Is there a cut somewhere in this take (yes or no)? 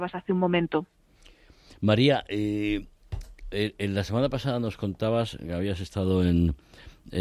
no